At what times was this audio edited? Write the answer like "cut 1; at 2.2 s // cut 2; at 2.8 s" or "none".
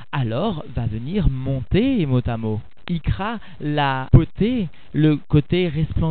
none